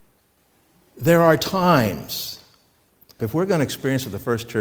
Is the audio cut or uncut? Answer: cut